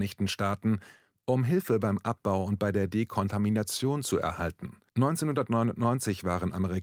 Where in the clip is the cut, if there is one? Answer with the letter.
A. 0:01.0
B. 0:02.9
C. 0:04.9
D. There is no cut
C